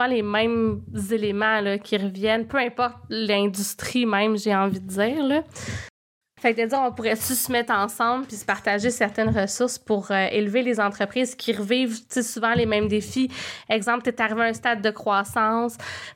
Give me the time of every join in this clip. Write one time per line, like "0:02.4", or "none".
0:06.4